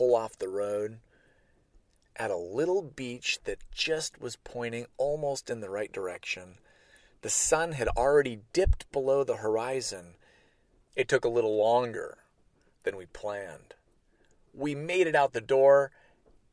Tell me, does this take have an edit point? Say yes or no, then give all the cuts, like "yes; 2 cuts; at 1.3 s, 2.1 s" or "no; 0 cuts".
yes; 1 cut; at 10.9 s